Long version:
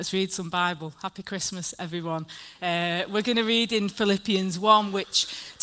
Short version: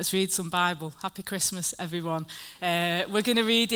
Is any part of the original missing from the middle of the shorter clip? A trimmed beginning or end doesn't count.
no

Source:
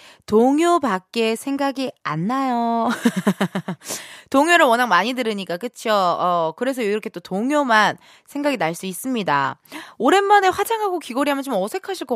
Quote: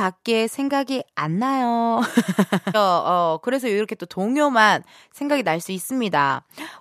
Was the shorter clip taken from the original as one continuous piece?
no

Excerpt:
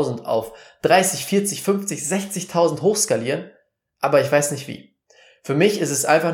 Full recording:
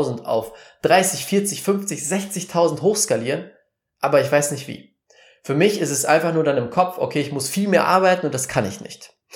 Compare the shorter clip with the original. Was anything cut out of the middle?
no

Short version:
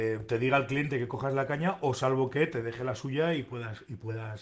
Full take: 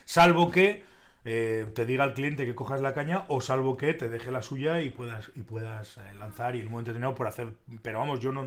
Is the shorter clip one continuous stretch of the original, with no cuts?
yes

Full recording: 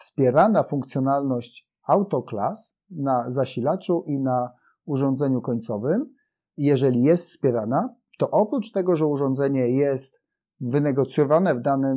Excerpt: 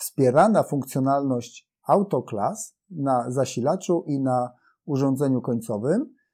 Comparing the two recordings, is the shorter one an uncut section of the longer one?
yes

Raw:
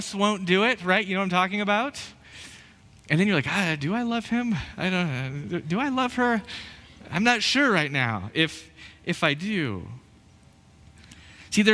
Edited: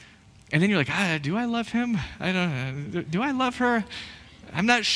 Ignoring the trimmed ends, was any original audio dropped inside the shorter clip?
no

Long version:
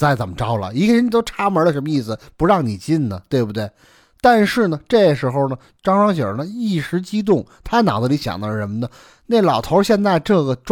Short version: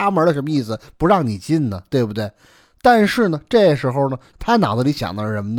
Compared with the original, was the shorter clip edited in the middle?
yes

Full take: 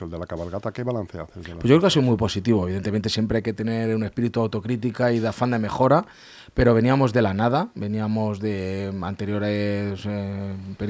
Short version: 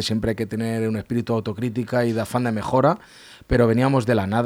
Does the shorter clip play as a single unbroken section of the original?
yes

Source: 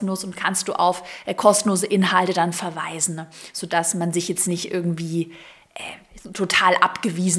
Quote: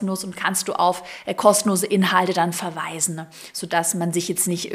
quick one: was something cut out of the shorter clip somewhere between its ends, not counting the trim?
no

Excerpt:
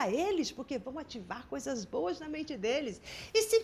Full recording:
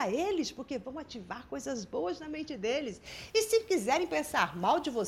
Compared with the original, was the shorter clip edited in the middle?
no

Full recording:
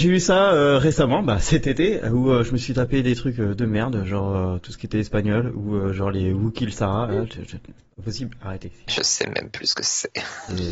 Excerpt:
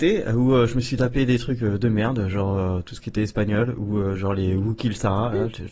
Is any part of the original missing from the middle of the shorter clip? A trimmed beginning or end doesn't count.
no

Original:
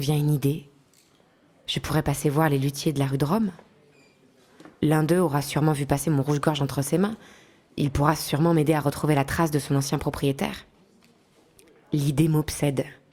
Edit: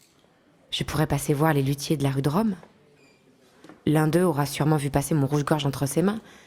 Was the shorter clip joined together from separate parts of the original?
no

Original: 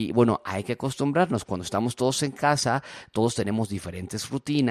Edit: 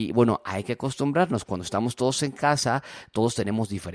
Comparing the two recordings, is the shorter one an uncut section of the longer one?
yes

